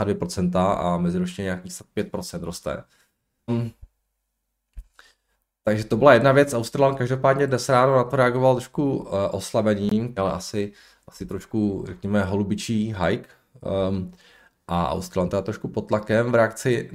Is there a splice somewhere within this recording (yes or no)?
yes